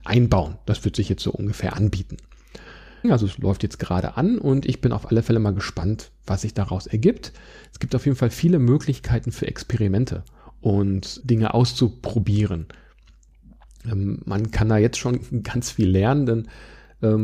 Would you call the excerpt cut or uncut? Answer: cut